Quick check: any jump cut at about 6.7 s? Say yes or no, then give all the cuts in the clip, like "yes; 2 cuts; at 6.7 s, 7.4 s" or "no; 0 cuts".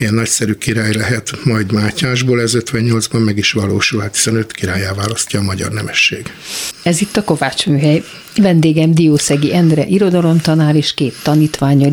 yes; 1 cut; at 6.7 s